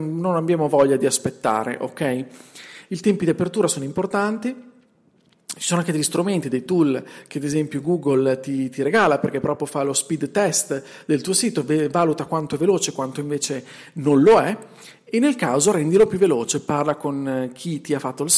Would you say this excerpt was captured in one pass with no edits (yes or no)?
no